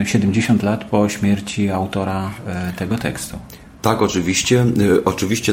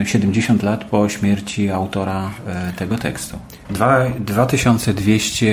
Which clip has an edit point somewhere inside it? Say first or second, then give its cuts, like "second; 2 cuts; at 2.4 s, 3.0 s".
second; 1 cut; at 3.6 s